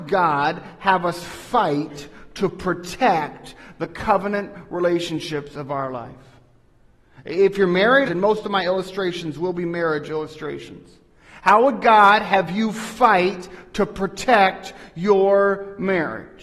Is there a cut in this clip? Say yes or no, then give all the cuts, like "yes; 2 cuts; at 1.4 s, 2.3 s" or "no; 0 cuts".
yes; 1 cut; at 8.1 s